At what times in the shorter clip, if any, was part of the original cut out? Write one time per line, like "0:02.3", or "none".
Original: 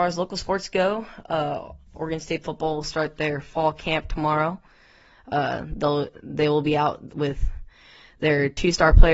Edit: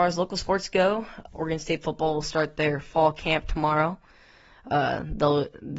0:01.3